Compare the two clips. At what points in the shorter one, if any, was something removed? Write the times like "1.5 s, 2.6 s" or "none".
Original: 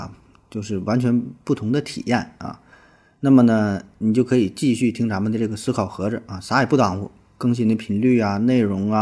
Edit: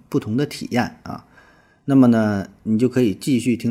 none